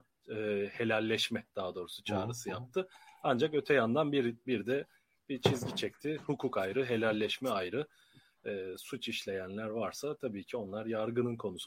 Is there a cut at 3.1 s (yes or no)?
no